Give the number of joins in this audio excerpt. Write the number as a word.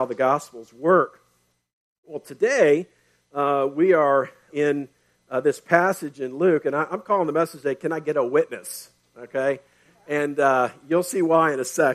one